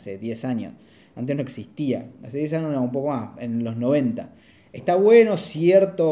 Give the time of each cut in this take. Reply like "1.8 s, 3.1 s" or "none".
4.6 s